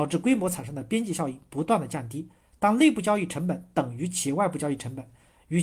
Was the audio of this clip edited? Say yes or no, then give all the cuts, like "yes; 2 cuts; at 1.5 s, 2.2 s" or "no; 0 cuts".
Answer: no; 0 cuts